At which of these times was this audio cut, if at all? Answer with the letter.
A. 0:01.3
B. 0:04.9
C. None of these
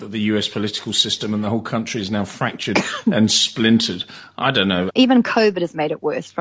B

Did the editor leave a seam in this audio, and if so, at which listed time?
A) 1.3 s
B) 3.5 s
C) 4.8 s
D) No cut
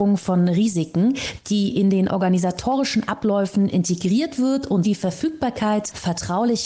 C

